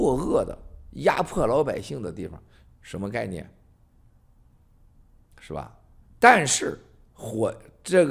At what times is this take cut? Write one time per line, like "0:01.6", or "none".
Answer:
0:02.7
0:06.1

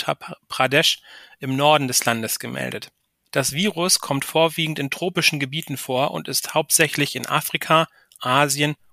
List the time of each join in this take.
none

